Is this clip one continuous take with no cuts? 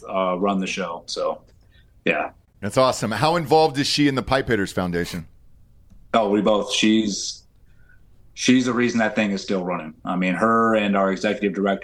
no; 1 cut; at 1.1 s

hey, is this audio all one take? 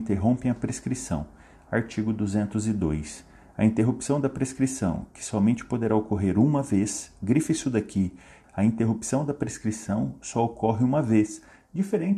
no; 1 cut; at 8.4 s

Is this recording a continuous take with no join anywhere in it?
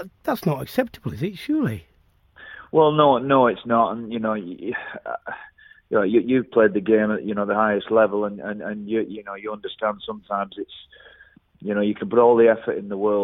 yes; 0 cuts

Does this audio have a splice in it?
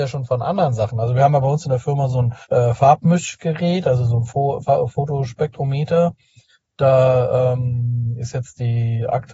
yes; 1 cut; at 2.4 s

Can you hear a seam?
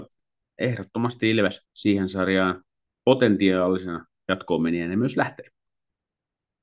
yes; 1 cut; at 1.6 s

